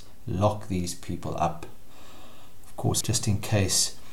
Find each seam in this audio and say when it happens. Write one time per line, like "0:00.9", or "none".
0:03.0

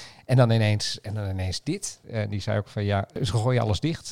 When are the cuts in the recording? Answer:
0:02.0

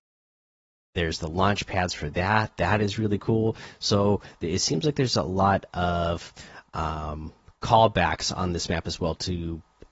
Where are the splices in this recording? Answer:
none

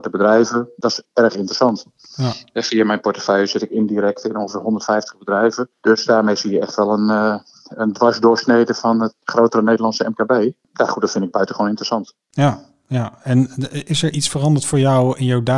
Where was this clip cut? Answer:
none

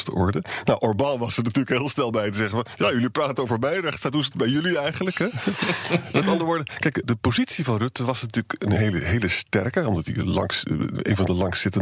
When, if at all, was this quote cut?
0:07.0

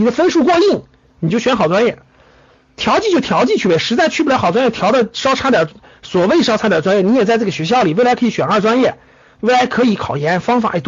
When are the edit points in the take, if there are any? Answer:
none

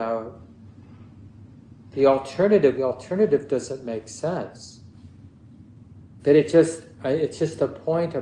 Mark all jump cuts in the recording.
0:02.8
0:06.2

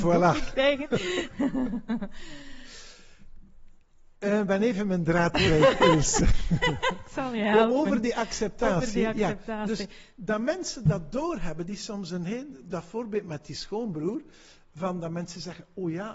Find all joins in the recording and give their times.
0:04.1

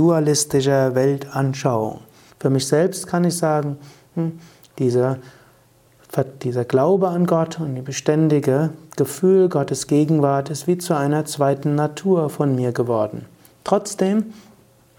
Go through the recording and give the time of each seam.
0:02.3

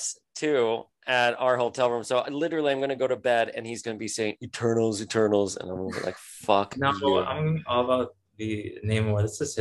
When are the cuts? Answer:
0:03.8

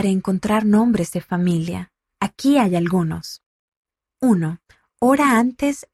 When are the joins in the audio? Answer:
none

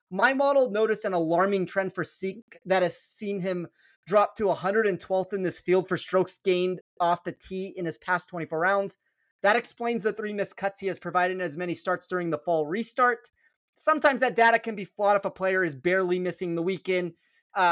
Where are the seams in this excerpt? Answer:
none

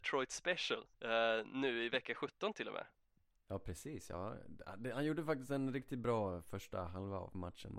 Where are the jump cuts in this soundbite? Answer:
0:00.9

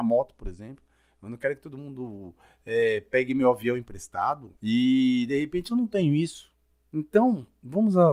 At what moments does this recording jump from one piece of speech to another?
0:04.6
0:06.9

